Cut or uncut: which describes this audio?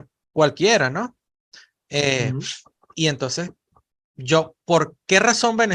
uncut